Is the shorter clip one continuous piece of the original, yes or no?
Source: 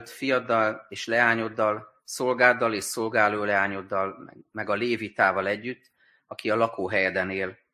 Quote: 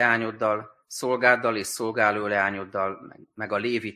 yes